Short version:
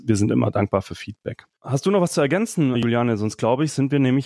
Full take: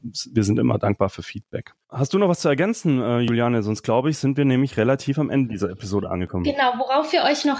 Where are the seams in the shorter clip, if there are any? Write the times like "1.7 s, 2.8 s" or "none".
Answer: 2.7 s